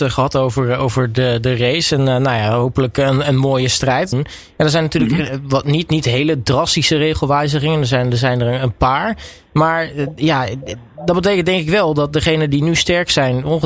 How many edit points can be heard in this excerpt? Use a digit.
1